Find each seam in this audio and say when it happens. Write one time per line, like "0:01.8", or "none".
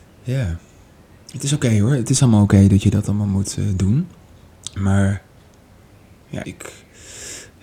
0:06.4